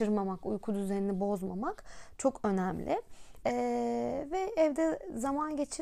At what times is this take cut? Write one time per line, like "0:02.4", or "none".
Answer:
0:03.4